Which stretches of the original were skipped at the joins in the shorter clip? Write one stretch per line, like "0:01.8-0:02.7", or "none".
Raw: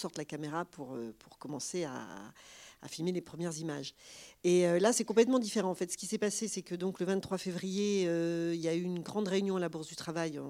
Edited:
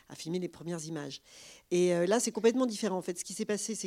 none